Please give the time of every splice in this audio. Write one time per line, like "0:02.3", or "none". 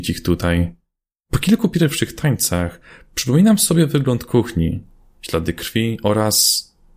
0:01.2